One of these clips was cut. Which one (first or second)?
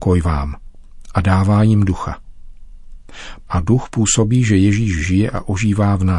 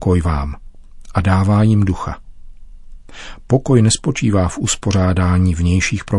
first